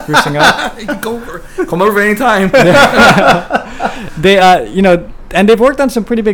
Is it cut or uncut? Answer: uncut